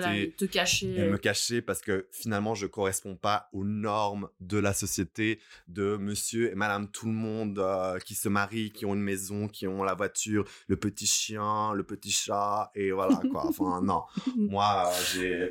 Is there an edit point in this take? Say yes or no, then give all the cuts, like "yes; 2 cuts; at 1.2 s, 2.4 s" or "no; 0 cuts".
no; 0 cuts